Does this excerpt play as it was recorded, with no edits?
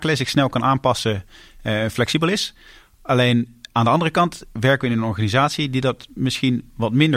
yes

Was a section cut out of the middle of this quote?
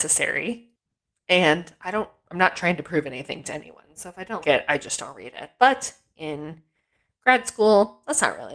yes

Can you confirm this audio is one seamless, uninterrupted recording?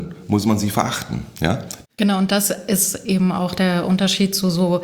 no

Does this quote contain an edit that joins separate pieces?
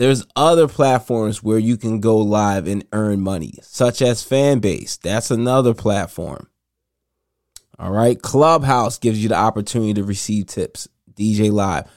no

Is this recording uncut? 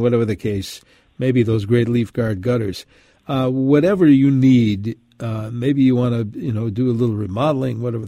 yes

